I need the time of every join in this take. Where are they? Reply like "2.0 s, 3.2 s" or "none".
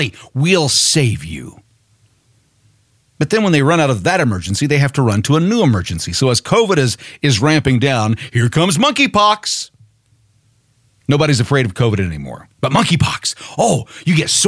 none